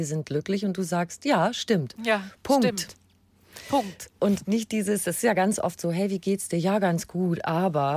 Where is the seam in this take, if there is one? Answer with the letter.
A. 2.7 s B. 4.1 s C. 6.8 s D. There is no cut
D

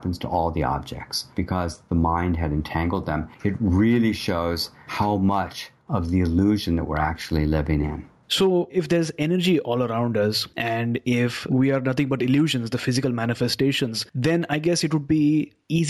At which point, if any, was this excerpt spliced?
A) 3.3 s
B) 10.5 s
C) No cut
C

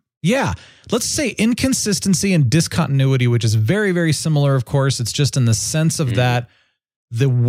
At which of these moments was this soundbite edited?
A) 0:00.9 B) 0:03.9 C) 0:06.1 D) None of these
D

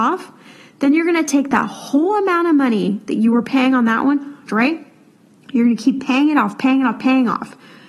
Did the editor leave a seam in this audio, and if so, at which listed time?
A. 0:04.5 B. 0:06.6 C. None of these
A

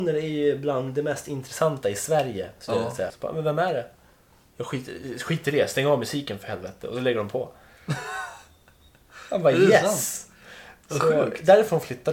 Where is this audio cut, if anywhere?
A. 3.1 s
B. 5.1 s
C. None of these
A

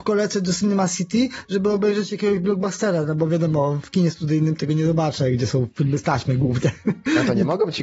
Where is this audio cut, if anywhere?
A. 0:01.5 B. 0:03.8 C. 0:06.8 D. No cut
D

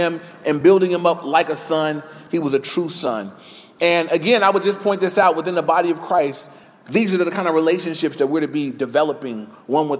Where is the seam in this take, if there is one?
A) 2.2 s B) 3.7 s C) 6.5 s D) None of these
D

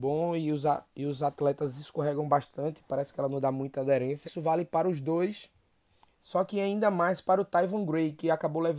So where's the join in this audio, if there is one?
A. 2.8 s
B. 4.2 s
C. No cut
B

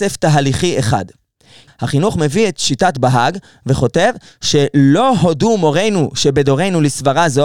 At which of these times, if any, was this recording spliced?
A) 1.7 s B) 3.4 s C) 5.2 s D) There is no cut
A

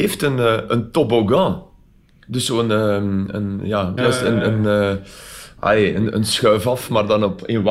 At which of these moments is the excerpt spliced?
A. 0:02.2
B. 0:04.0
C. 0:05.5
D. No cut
B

